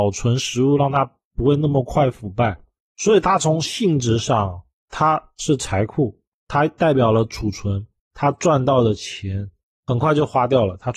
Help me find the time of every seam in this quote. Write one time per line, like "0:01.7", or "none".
0:08.0